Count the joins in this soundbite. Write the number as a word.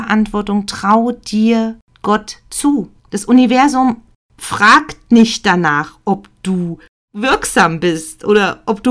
one